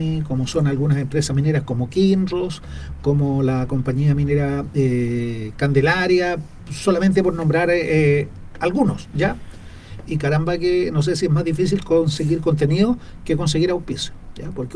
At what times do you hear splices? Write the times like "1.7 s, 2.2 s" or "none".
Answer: 10.1 s